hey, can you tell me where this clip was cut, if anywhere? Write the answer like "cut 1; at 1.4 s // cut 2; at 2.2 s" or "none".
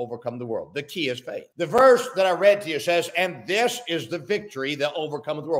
cut 1; at 1.5 s